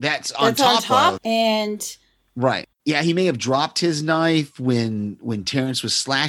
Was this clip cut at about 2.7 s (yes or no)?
yes